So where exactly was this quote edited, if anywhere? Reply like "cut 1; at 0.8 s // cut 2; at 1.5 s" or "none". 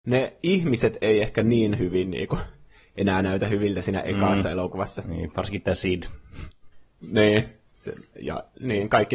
none